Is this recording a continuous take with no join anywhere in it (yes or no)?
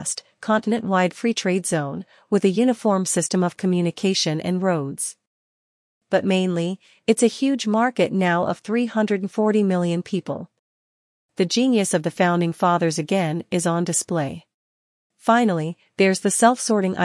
no